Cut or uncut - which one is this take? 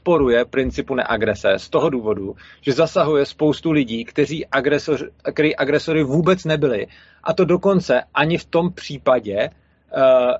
uncut